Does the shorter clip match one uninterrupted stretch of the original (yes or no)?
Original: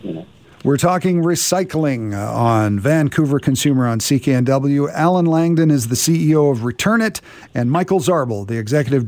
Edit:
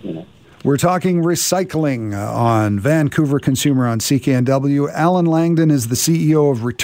yes